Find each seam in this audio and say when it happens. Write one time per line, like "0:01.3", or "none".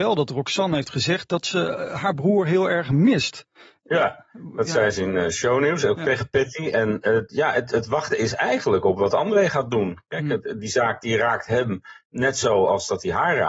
none

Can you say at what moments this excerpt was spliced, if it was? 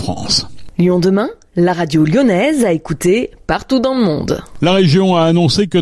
none

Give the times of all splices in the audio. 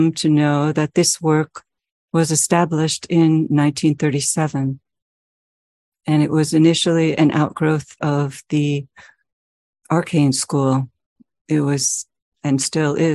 none

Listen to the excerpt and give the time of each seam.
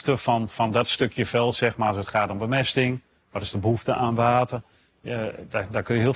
none

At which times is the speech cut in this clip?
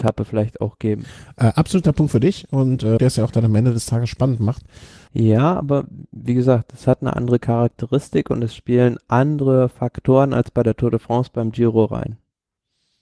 0:03.0
0:05.1

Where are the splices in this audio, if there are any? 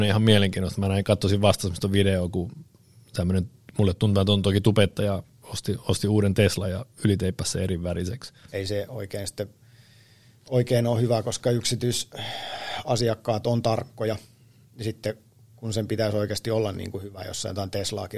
0:08.5

